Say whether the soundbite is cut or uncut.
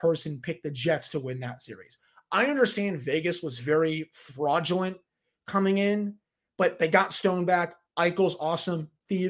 uncut